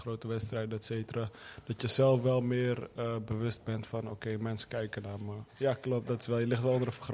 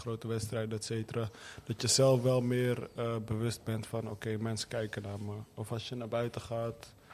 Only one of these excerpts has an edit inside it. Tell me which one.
first; 1 cut; at 5.5 s

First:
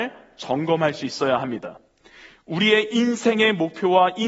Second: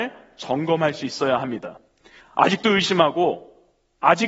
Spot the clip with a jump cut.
second; 1 cut; at 2.2 s

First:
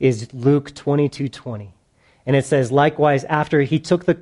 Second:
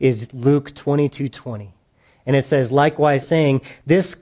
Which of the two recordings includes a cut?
second; 1 cut; at 3.2 s

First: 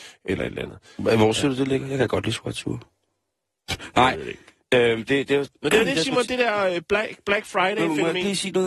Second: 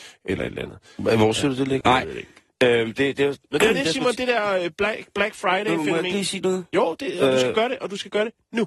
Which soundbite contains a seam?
second; 1 cut; at 1.8 s

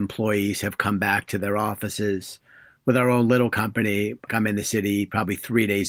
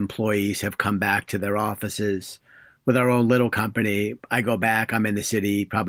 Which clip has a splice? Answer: first; 1 cut; at 4.3 s

